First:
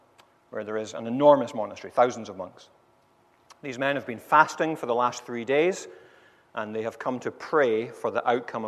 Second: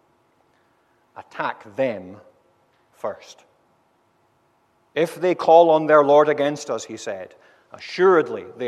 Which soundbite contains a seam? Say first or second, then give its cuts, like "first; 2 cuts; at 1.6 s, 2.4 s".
second; 1 cut; at 4.8 s